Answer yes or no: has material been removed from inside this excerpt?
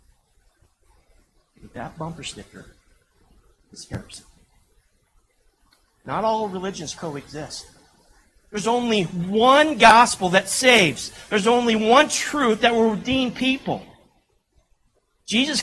no